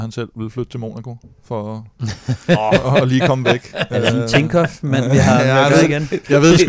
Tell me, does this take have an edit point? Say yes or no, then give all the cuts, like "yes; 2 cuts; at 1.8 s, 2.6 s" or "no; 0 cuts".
no; 0 cuts